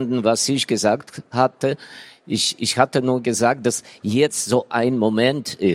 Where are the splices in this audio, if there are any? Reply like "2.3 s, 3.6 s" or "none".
none